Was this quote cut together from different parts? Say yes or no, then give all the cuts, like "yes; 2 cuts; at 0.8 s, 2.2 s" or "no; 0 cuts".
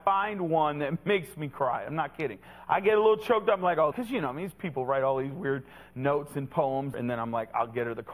yes; 2 cuts; at 3.9 s, 6.9 s